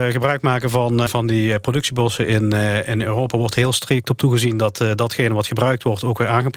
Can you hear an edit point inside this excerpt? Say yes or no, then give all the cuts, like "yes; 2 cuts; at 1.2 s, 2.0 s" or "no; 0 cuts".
yes; 1 cut; at 1.1 s